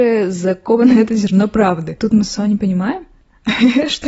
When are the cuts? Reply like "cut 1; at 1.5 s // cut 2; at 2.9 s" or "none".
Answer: cut 1; at 2.0 s